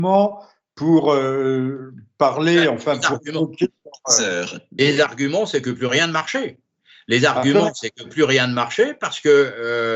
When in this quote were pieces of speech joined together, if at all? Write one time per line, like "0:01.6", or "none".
none